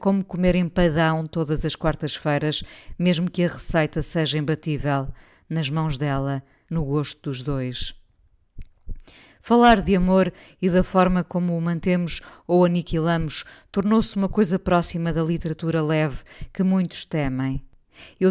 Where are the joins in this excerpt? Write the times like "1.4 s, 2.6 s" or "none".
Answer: 6.7 s